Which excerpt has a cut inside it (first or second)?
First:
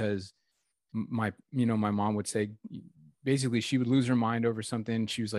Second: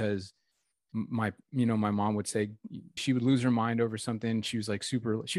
second